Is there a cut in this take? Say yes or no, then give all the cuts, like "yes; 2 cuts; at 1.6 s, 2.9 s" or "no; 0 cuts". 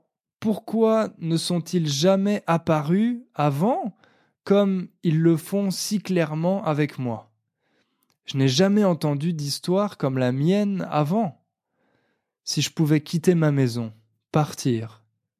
no; 0 cuts